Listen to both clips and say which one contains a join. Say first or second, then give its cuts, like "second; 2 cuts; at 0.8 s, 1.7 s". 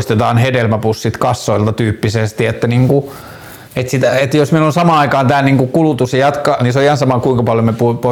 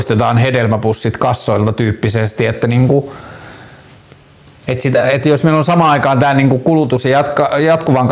first; 2 cuts; at 3.6 s, 6.6 s